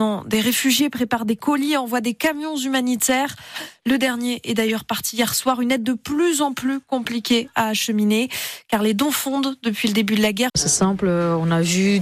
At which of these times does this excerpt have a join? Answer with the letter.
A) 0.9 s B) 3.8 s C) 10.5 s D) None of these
C